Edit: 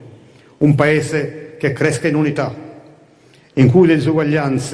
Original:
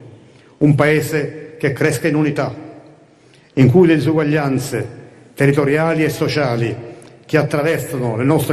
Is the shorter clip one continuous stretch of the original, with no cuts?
yes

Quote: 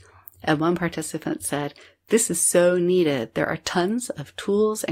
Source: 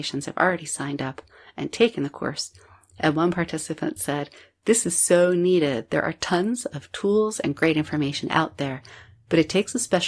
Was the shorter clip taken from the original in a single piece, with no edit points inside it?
yes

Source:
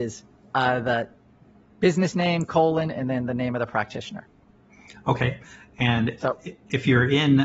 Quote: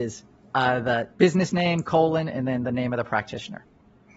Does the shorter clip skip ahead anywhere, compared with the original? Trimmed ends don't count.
yes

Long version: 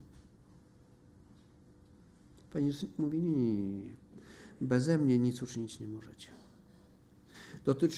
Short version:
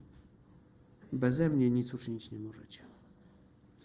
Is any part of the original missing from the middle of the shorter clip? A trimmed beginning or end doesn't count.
yes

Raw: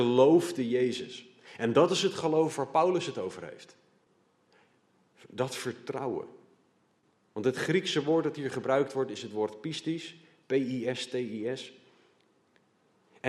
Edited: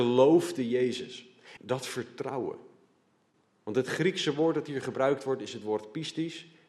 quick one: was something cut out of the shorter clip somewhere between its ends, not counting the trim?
yes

